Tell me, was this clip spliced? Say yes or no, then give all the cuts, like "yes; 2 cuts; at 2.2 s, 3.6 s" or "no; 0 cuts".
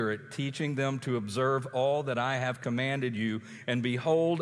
no; 0 cuts